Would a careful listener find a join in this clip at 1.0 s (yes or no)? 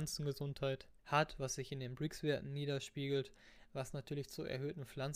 yes